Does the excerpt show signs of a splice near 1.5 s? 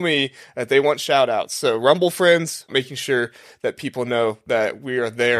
no; 1 cut; at 2.7 s

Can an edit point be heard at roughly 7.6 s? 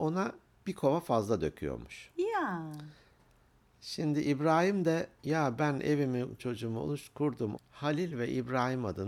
yes; 2 cuts; at 6.4 s, 7.6 s

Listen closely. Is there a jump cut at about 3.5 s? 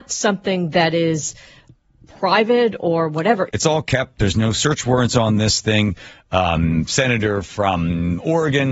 yes; 1 cut; at 3.5 s

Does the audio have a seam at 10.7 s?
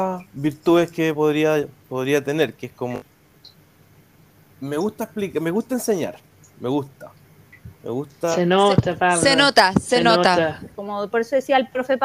yes; 1 cut; at 10.7 s

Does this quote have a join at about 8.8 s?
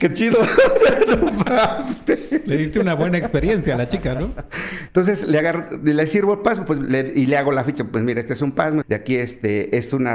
yes; 2 cuts; at 4.9 s, 8.8 s

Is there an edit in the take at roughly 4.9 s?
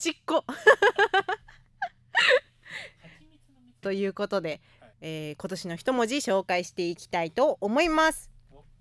yes; 1 cut; at 4.9 s

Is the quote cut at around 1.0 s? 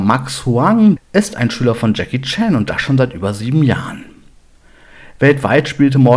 yes; 1 cut; at 1.0 s

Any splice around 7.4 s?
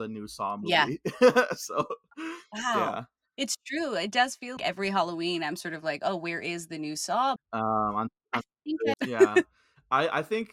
yes; 3 cuts; at 4.6 s, 7.4 s, 8.9 s

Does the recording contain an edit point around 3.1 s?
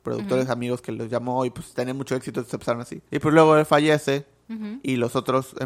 yes; 1 cut; at 3.1 s

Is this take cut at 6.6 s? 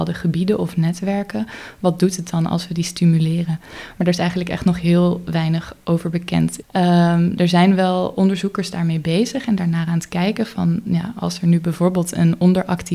yes; 1 cut; at 6.6 s

